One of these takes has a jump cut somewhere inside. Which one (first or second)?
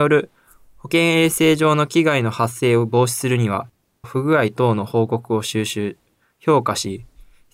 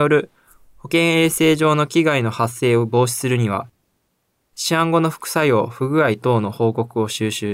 first